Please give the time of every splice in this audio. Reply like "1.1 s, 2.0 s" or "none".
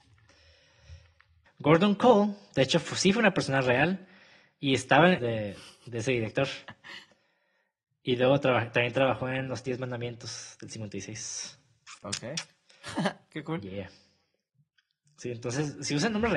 1.5 s, 5.2 s

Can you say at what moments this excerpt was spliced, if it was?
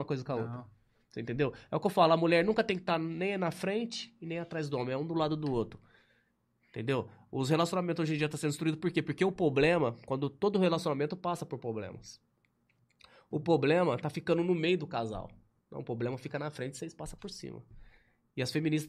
none

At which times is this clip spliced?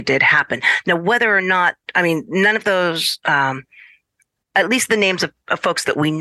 none

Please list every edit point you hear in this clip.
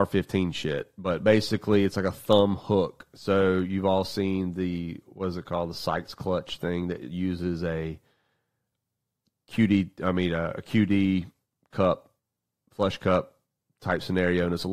none

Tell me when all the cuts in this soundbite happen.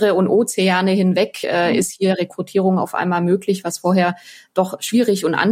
none

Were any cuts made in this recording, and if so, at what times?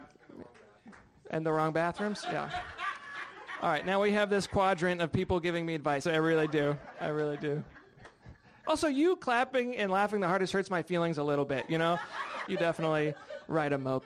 6.1 s, 12.5 s

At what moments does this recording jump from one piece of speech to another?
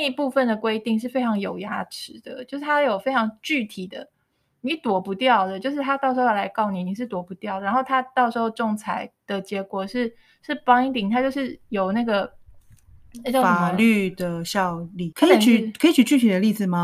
15.1 s

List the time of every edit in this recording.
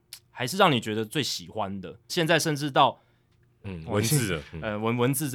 2.1 s, 3.6 s

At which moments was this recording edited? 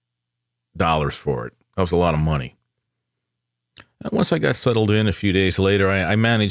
none

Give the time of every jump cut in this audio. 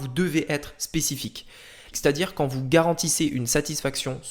1.9 s

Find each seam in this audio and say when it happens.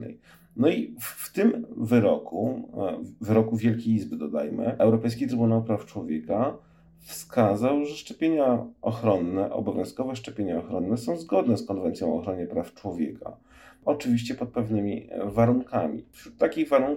none

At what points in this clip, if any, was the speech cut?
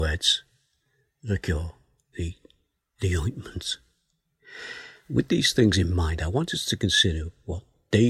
2.1 s

